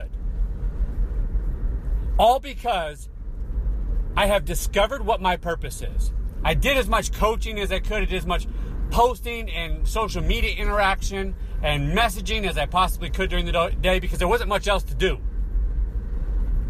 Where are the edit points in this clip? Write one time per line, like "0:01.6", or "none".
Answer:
0:06.4